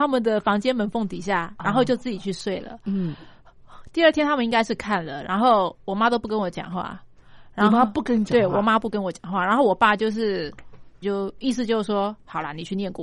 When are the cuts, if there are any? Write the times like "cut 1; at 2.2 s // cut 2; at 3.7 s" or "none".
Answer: cut 1; at 11.0 s